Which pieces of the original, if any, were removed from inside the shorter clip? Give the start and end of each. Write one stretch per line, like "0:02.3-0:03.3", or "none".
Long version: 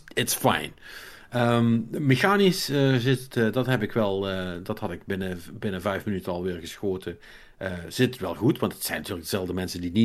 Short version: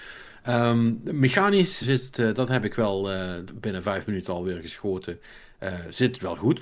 0:02.7-0:03.0
0:04.6-0:05.5